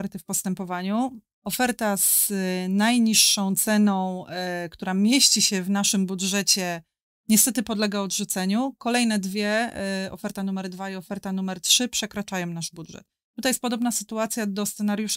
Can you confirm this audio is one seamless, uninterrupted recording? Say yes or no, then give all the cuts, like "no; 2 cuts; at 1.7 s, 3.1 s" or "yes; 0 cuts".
yes; 0 cuts